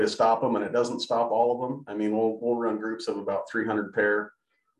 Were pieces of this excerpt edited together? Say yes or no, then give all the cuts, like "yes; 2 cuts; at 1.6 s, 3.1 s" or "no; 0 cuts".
no; 0 cuts